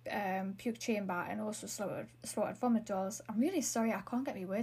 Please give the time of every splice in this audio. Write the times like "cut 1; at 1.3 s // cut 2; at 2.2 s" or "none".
none